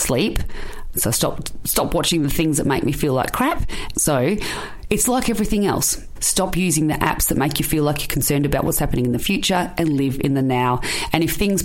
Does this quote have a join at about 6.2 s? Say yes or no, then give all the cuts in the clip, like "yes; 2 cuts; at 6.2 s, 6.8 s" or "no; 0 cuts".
yes; 3 cuts; at 0.9 s, 3.9 s, 6.2 s